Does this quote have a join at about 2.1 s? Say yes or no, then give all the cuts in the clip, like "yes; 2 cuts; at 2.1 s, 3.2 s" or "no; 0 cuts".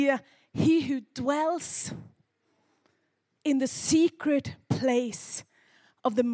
no; 0 cuts